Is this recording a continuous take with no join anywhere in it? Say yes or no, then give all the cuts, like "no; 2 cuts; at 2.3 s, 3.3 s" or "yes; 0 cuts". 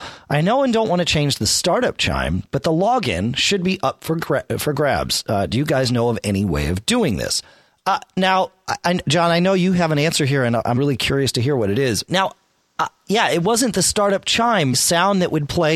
no; 3 cuts; at 10.8 s, 12.1 s, 14.7 s